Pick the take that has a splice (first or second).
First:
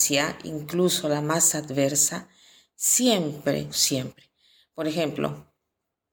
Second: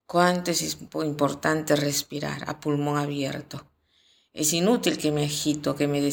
first